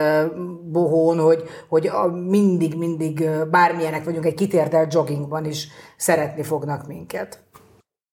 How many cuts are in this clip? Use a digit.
0